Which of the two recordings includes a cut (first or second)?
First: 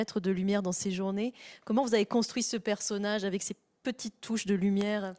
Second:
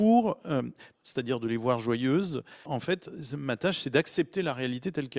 second